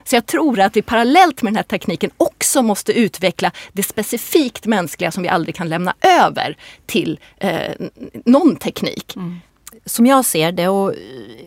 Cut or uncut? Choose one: uncut